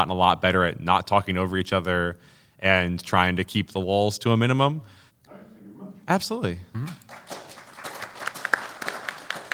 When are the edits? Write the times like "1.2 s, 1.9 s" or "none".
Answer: 5.1 s

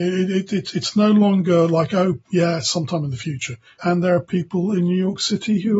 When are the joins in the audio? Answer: 2.2 s, 3.8 s

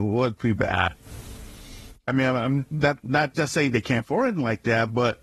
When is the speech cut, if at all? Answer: none

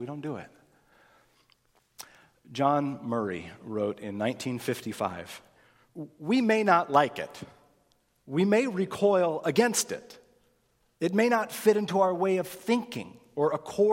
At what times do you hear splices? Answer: none

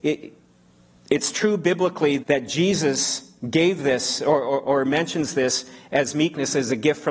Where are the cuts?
2.2 s

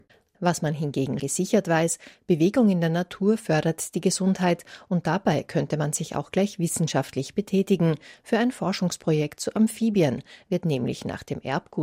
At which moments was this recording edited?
1.2 s

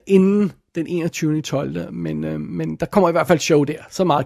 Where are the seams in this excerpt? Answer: none

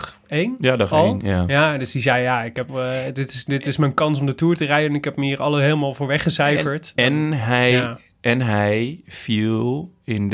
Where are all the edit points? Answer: none

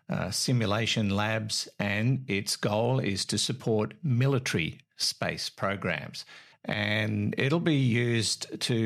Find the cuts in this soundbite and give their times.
6.5 s

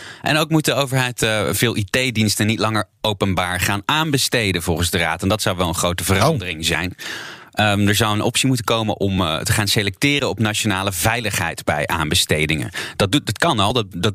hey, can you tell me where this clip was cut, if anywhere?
none

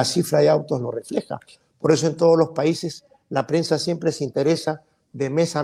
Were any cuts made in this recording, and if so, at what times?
none

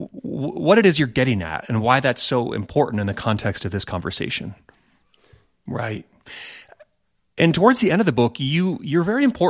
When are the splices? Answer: 5.7 s

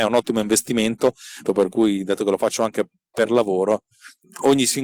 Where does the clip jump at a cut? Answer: 1.4 s

